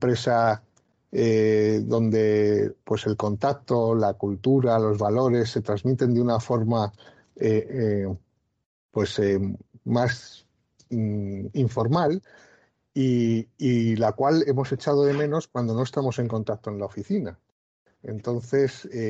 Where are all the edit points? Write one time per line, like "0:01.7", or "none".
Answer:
none